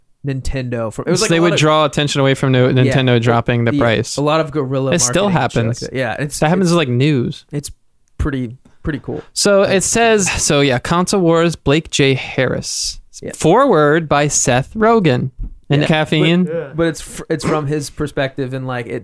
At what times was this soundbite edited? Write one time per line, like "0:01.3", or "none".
0:10.3
0:15.8